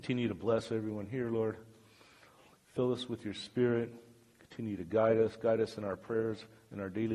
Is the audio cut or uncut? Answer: uncut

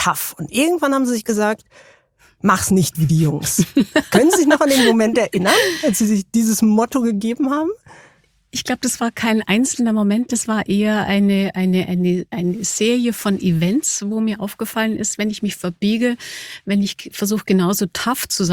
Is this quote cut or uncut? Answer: uncut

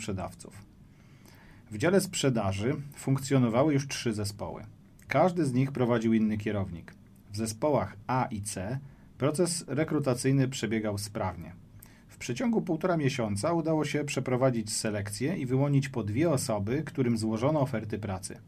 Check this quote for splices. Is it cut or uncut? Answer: uncut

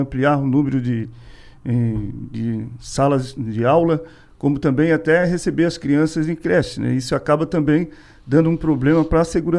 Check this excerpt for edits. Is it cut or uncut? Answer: uncut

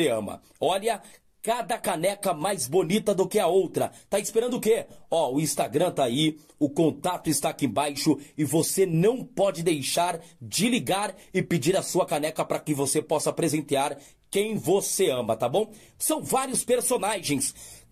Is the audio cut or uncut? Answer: uncut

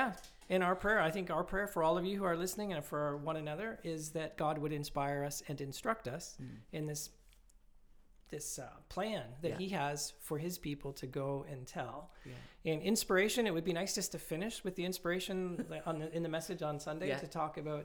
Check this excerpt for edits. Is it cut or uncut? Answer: uncut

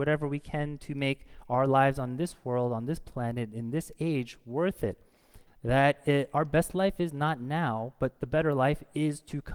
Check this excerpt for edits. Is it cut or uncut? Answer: cut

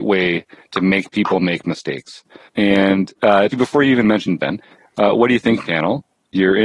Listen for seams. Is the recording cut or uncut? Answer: cut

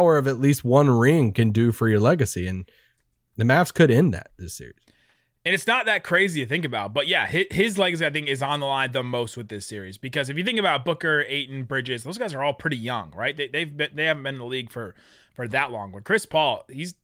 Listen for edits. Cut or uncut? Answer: uncut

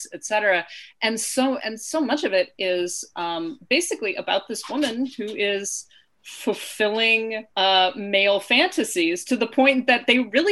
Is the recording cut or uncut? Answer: cut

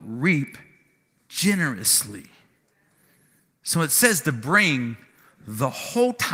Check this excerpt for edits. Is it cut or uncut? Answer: uncut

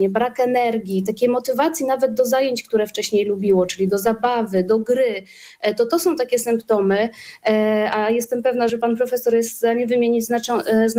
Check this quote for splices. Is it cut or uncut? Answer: cut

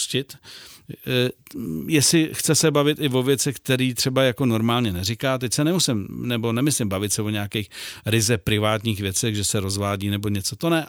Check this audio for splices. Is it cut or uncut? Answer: uncut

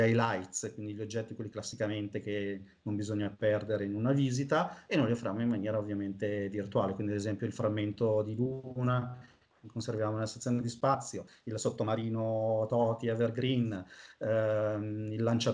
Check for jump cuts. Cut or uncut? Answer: uncut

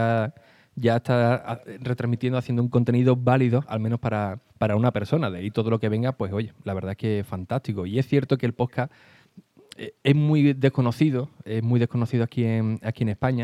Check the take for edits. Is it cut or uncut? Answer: cut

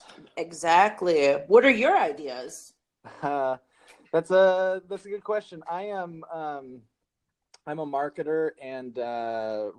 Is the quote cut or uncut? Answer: uncut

